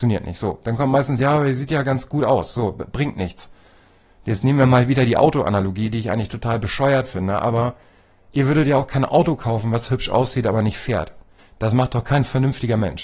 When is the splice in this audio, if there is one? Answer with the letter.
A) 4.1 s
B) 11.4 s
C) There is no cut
B